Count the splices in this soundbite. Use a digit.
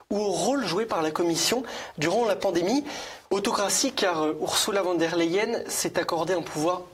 1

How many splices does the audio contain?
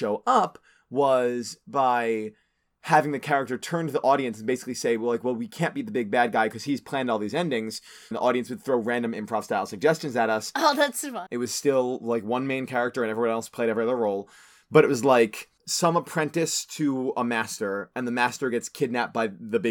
2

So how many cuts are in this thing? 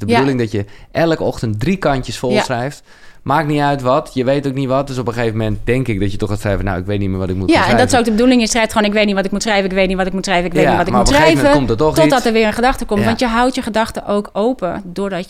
0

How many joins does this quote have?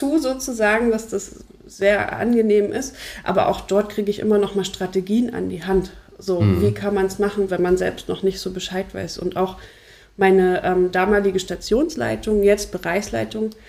1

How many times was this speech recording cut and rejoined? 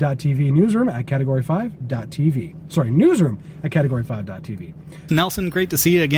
1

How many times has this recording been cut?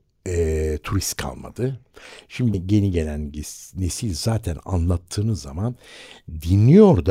1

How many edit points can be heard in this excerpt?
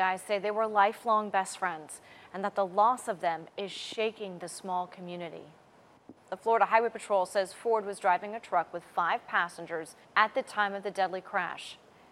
2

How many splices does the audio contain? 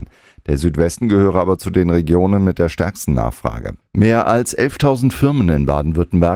1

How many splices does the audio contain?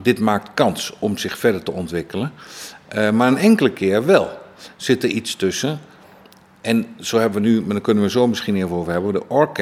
0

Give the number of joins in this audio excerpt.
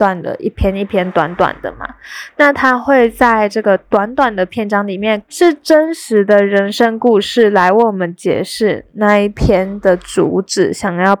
1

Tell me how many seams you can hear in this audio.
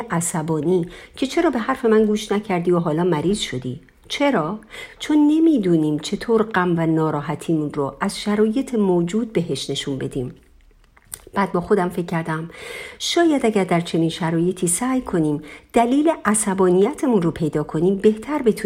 0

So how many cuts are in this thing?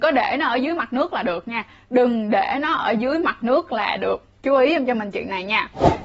1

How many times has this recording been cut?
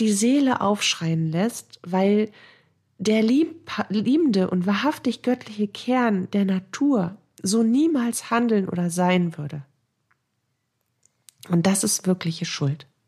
0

